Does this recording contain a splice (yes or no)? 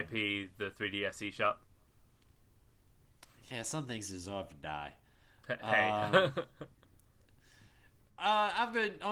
no